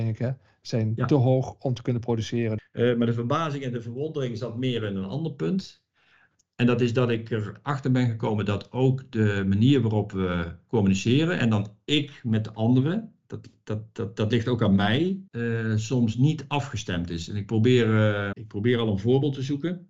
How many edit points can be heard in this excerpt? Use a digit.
3